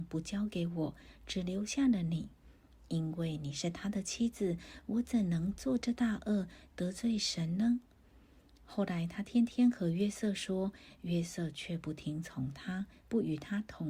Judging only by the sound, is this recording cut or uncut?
uncut